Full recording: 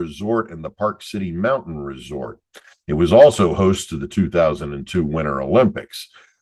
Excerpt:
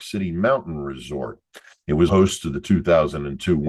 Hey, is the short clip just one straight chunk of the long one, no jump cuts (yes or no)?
no